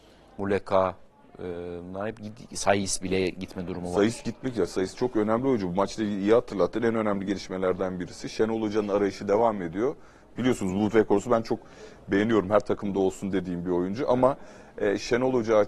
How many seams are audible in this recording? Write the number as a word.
one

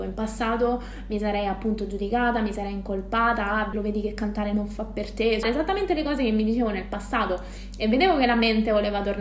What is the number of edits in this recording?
two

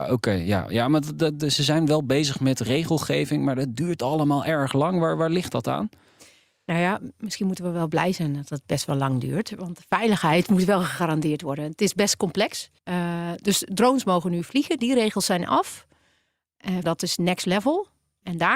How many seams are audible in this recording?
two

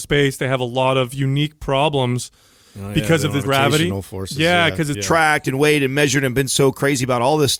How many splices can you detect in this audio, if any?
two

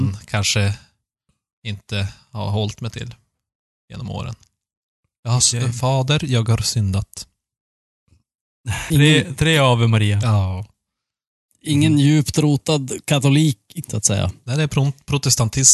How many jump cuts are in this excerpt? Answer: two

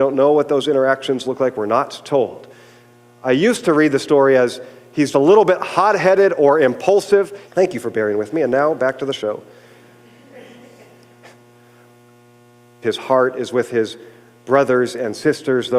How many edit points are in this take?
three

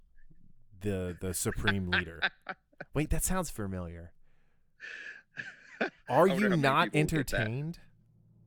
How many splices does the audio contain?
zero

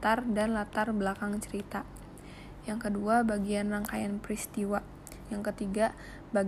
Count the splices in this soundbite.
one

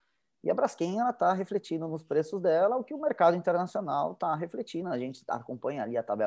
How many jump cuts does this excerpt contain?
zero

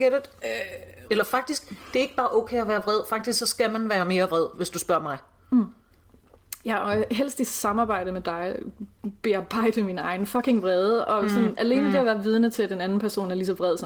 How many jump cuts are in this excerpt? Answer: one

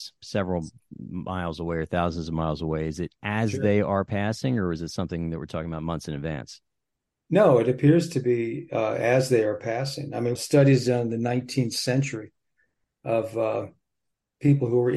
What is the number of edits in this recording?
one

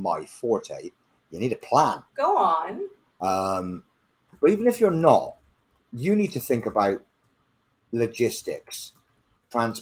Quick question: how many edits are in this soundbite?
two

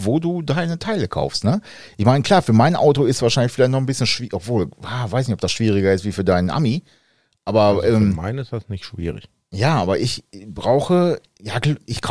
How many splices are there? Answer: zero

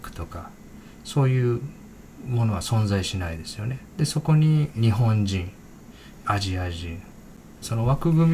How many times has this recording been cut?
one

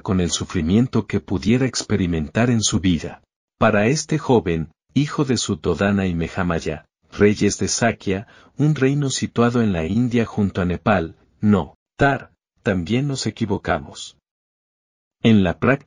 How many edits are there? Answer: zero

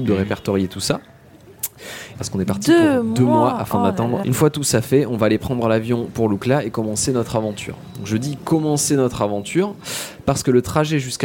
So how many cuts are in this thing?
two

